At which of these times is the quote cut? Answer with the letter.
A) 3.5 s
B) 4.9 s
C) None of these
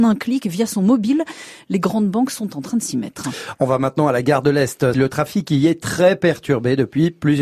B